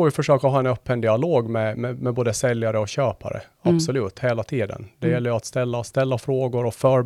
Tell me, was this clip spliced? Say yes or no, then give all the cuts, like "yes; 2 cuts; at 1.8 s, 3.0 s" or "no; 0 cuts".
no; 0 cuts